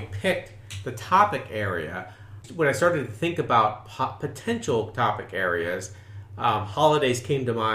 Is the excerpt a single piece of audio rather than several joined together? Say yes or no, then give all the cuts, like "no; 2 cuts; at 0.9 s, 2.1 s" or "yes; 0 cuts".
yes; 0 cuts